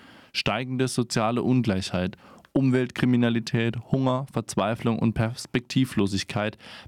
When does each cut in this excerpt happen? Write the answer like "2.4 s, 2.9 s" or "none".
none